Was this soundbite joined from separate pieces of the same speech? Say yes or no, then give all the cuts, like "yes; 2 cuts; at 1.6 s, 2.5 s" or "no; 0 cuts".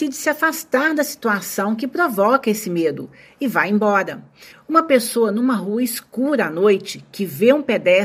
yes; 1 cut; at 4.5 s